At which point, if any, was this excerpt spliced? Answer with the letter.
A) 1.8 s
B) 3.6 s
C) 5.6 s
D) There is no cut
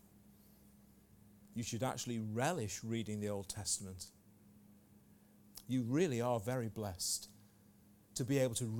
C